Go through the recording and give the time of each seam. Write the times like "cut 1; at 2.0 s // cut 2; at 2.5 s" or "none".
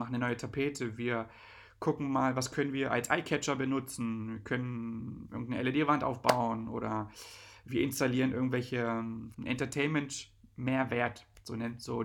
cut 1; at 9.3 s